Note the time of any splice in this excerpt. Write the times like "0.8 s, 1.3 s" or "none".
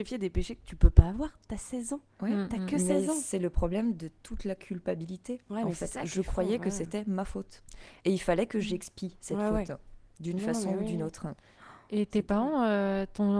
none